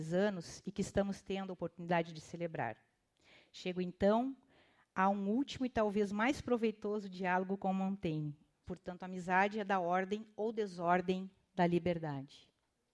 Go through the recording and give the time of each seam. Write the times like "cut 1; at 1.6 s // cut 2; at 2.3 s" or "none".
cut 1; at 8.6 s